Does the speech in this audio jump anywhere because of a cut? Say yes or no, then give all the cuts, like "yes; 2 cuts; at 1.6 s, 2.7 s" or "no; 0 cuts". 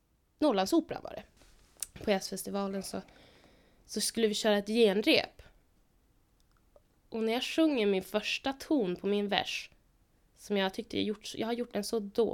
no; 0 cuts